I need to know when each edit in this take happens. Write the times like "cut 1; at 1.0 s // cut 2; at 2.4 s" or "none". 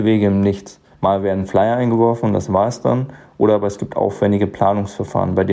cut 1; at 0.9 s